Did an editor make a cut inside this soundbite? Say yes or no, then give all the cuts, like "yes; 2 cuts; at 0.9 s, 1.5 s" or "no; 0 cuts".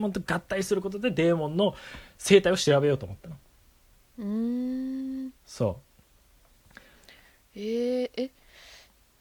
no; 0 cuts